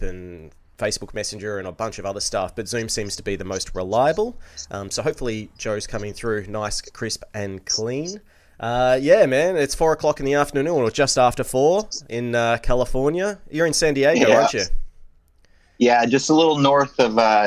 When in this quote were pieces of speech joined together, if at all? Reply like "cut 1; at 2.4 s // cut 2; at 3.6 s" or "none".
none